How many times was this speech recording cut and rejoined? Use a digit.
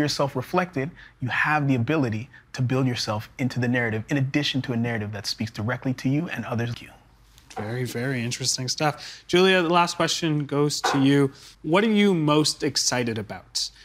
2